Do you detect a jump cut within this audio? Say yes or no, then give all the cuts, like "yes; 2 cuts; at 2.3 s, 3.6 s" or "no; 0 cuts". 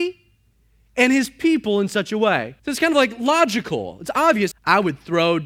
yes; 2 cuts; at 2.6 s, 4.5 s